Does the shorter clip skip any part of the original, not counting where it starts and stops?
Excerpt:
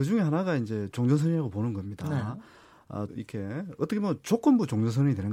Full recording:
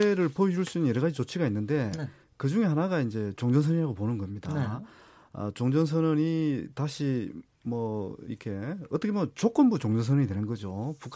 yes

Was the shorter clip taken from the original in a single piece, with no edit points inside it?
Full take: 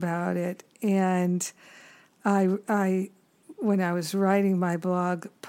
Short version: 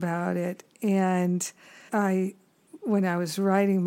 no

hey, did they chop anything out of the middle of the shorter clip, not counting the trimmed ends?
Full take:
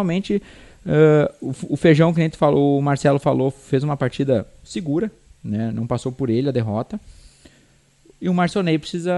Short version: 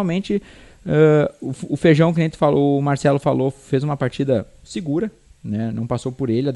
no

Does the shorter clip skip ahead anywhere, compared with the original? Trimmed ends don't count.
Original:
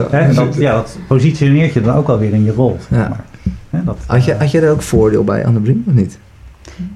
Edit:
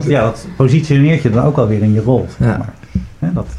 no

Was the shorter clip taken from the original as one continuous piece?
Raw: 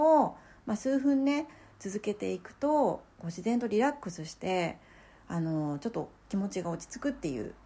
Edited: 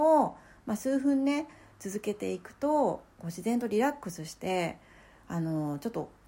yes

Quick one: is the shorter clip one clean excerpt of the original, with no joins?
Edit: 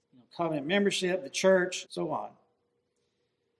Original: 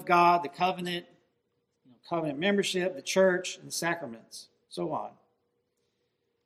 no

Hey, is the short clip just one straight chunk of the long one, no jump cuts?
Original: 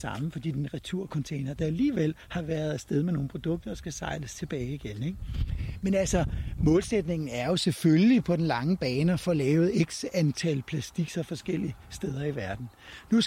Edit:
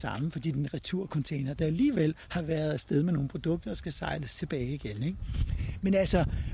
yes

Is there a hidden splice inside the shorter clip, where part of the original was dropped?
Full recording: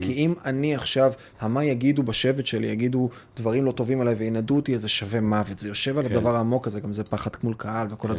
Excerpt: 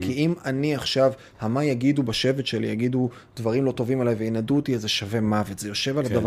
no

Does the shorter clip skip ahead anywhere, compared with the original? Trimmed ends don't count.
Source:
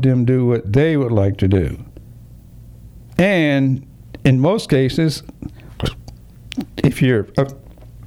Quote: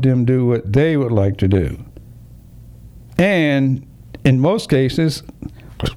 no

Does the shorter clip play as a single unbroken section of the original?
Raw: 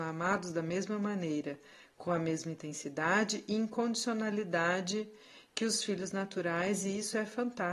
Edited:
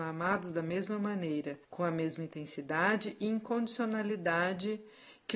no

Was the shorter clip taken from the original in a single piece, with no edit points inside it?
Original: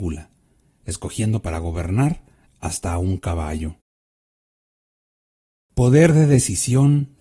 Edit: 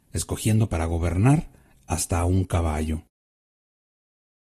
yes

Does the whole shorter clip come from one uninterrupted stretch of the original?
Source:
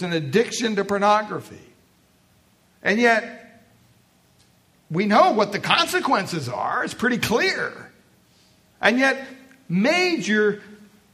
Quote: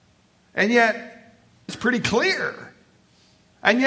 no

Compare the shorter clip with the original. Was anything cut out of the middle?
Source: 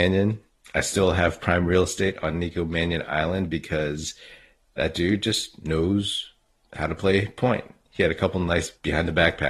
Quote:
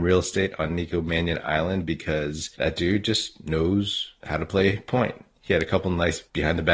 yes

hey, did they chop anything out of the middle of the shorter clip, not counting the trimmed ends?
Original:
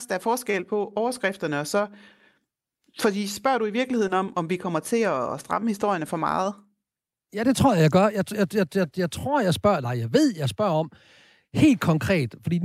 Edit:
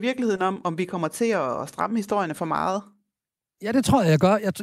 no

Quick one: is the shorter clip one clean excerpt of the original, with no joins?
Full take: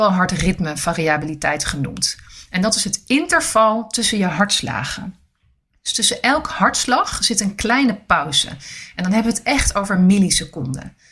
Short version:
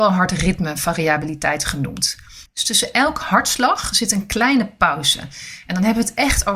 no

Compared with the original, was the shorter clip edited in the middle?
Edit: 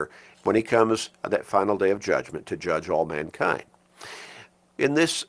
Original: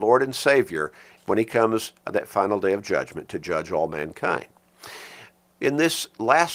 no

